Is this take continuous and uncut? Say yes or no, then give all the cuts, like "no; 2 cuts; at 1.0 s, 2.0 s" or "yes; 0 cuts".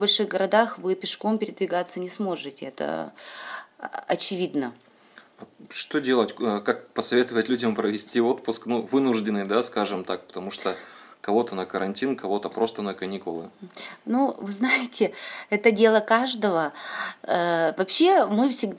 yes; 0 cuts